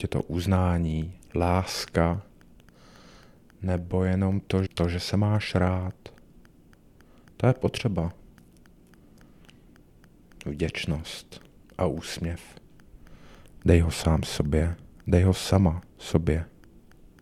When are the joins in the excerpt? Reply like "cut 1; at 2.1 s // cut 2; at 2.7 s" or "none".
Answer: cut 1; at 1.2 s // cut 2; at 4.7 s